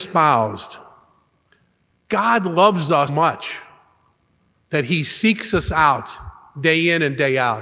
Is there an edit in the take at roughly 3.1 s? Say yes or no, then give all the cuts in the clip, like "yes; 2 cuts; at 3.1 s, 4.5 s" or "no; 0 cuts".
yes; 1 cut; at 3.1 s